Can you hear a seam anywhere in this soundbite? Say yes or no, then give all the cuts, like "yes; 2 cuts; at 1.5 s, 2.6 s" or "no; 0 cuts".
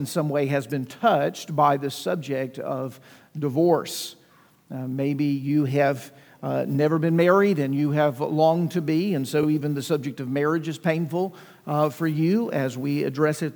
no; 0 cuts